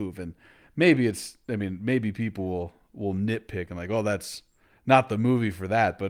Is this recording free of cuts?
yes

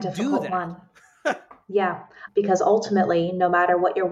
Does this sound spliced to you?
yes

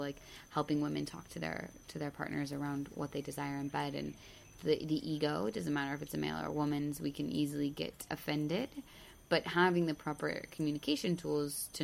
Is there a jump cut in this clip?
yes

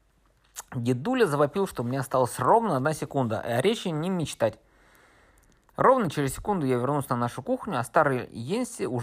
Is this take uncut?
yes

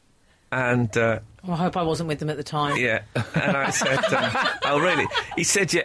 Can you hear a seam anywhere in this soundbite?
no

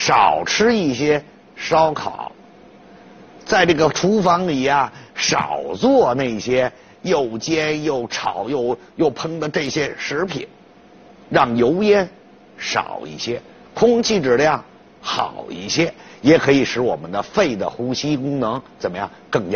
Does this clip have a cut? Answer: no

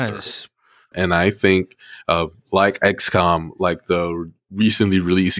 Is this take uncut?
no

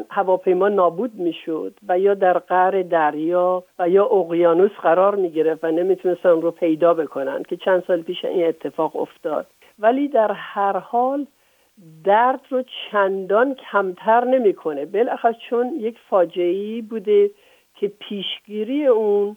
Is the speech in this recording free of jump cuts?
yes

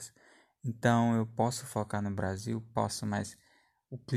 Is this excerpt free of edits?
yes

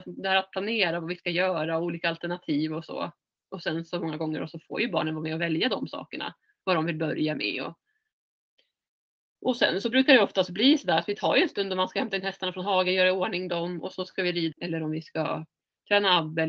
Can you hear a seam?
yes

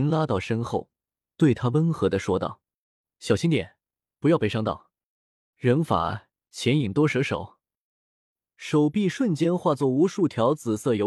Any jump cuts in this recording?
yes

